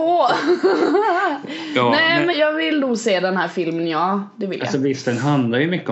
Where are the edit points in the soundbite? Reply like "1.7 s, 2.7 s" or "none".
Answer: 2.3 s